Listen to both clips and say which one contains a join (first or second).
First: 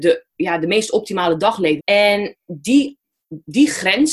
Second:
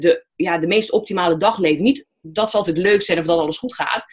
first